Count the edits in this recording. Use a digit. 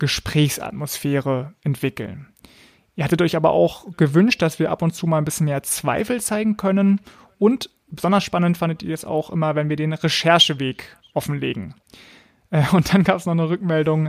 0